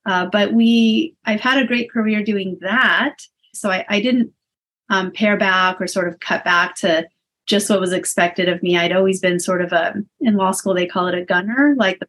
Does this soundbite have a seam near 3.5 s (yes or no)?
yes